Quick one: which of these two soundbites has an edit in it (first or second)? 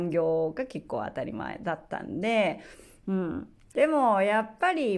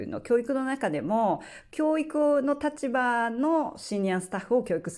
first